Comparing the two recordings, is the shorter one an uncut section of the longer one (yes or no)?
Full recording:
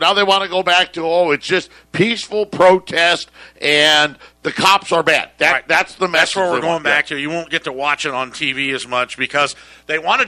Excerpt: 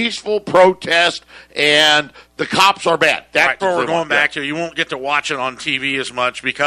no